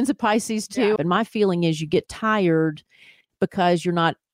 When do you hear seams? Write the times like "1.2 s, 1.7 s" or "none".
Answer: 1.0 s

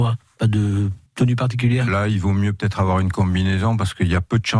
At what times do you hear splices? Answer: 1.1 s

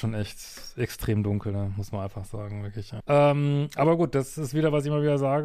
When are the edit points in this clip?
3.0 s

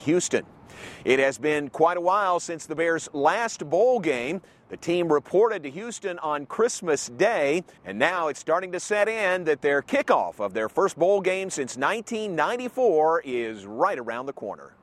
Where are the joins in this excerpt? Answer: 7.8 s

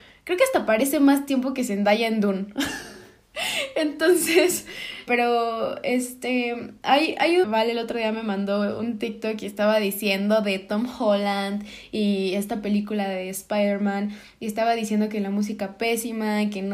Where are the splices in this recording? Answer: 5.1 s, 7.4 s

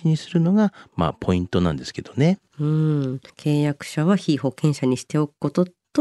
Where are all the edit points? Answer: 3.3 s

